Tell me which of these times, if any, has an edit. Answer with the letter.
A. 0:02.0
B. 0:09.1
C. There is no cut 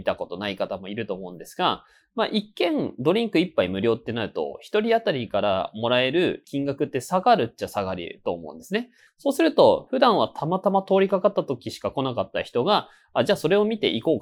B